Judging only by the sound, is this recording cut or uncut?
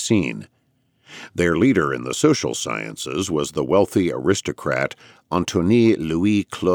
uncut